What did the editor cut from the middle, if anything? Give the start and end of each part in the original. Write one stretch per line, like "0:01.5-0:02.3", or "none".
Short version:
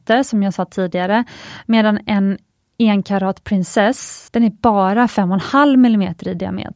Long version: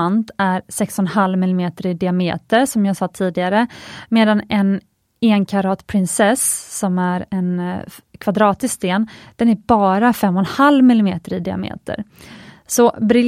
0:06.7-0:09.3